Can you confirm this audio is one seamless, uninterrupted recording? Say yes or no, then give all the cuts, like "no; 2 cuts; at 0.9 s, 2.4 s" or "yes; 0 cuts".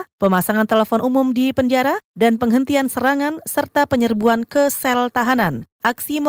yes; 0 cuts